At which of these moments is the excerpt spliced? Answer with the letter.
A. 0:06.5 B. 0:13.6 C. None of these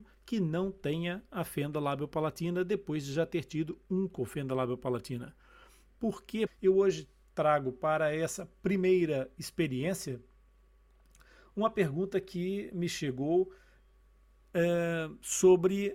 A